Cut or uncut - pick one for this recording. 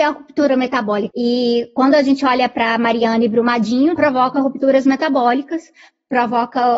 cut